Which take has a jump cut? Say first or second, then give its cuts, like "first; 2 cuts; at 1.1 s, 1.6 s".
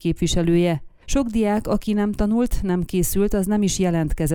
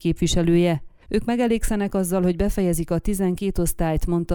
second; 1 cut; at 1.1 s